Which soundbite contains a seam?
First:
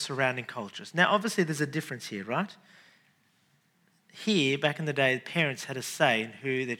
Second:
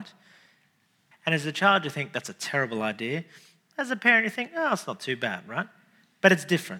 second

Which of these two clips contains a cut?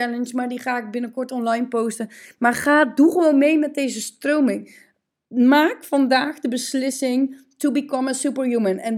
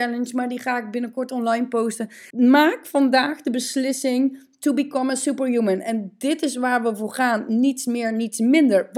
second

